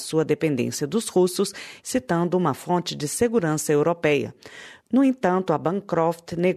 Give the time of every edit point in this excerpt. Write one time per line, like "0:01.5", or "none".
0:01.8